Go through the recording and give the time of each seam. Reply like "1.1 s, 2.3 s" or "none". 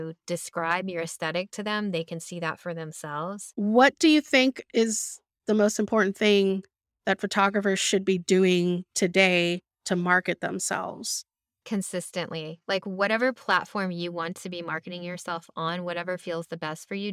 3.5 s